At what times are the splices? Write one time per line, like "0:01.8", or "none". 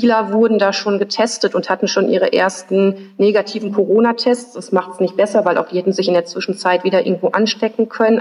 none